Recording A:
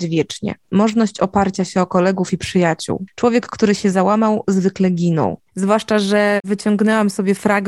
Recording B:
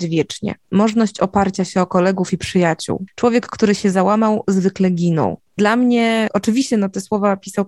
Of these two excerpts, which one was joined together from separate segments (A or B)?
A